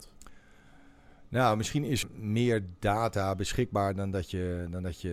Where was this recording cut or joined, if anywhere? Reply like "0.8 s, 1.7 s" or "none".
2.0 s